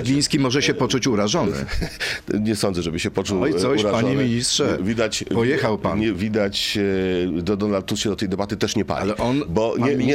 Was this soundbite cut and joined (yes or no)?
yes